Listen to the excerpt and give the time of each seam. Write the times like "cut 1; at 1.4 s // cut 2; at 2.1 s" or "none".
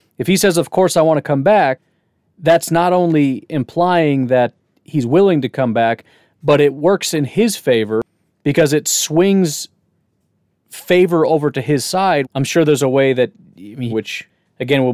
cut 1; at 12.2 s // cut 2; at 13.9 s